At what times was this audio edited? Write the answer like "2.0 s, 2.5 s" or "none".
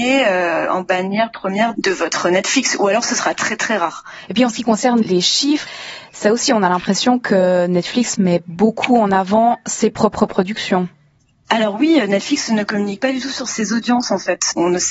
none